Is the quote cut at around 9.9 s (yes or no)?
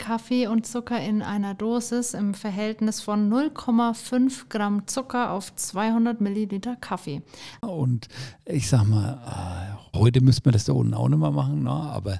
yes